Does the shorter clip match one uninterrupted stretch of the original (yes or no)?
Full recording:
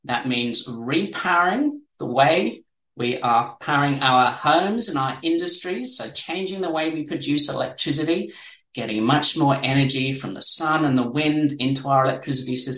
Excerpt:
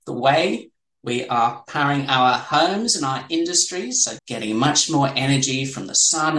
no